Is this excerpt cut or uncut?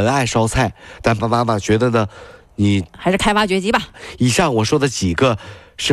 cut